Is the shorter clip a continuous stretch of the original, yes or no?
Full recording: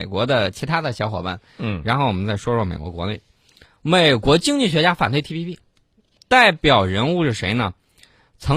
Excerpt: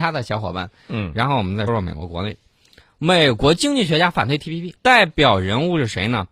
no